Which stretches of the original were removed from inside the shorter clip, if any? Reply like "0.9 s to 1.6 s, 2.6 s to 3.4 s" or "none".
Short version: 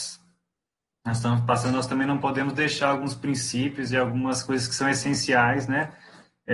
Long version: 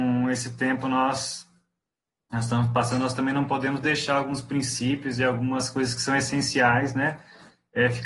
none